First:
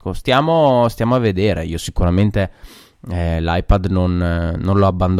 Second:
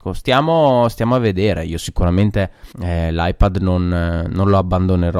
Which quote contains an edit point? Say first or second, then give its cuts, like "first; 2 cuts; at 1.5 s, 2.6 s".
second; 1 cut; at 2.7 s